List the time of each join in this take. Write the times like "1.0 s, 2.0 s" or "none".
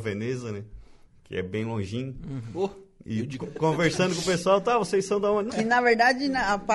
3.4 s, 5.5 s